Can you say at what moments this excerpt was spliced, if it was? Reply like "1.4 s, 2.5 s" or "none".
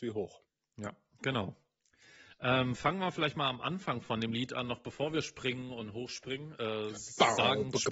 none